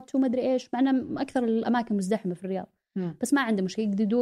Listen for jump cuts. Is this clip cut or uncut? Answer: uncut